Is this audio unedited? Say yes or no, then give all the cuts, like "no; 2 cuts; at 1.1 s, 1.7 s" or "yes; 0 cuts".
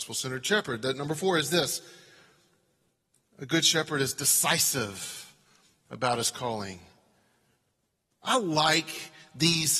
yes; 0 cuts